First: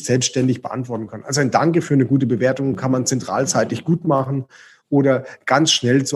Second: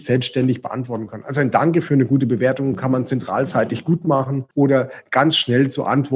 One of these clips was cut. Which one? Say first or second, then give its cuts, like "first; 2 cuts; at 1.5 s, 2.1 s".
second; 1 cut; at 4.5 s